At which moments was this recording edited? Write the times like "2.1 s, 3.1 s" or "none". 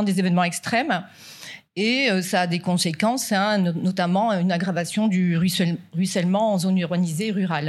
none